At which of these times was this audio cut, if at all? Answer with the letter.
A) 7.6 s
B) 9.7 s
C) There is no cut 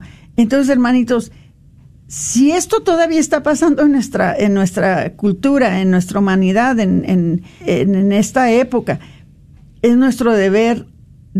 A